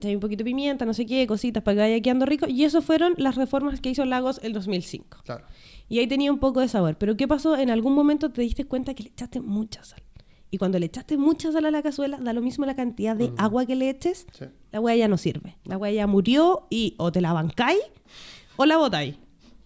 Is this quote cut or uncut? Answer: uncut